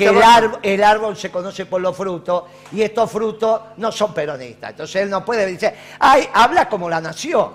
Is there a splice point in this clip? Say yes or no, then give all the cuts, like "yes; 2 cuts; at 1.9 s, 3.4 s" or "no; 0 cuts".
no; 0 cuts